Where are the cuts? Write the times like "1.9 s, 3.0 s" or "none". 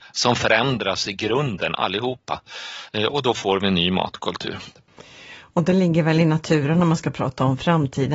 none